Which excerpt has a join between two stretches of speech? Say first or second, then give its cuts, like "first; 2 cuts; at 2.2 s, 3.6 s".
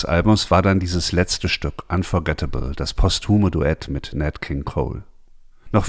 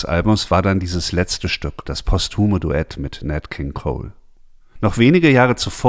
second; 1 cut; at 1.9 s